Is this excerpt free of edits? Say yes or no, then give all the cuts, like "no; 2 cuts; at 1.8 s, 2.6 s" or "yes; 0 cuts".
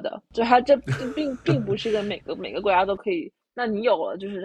no; 1 cut; at 3.4 s